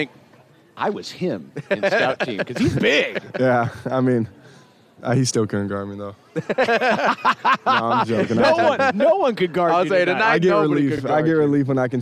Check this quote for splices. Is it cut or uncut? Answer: uncut